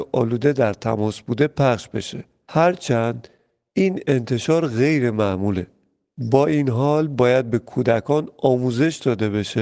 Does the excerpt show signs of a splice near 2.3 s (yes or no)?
no